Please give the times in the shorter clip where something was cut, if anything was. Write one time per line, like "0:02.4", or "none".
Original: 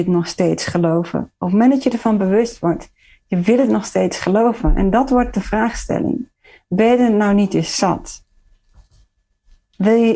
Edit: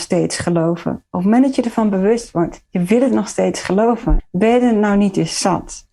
0:02.7
0:04.2